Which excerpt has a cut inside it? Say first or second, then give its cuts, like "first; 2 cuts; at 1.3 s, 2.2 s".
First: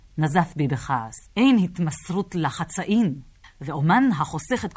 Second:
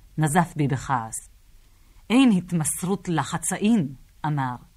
first; 2 cuts; at 1.3 s, 3.4 s